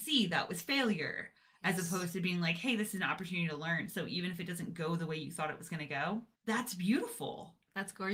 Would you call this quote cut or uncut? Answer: cut